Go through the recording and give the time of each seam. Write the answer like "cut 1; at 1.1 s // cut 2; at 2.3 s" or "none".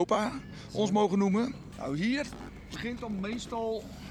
cut 1; at 1.7 s